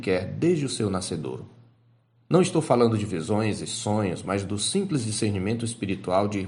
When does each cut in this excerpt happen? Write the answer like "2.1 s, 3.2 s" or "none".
none